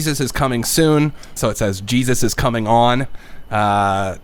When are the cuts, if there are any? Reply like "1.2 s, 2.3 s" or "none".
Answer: 1.4 s